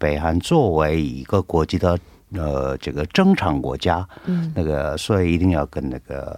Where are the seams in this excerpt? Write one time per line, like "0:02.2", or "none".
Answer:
none

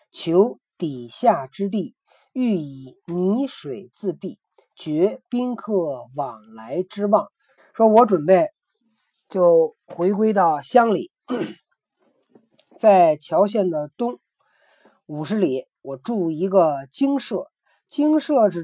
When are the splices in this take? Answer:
0:07.6

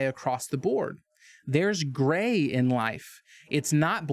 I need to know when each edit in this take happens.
none

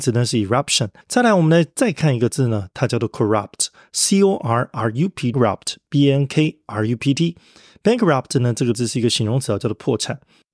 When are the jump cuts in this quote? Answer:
0:01.0
0:05.3

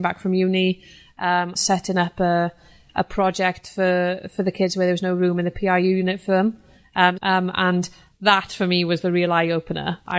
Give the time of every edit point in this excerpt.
0:01.6
0:07.2

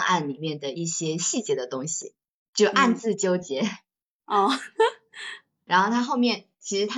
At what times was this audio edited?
0:05.7

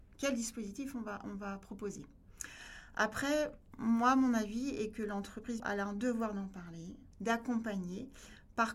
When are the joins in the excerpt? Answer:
0:05.6
0:07.1

